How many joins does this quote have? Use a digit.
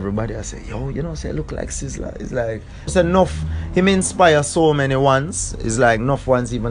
1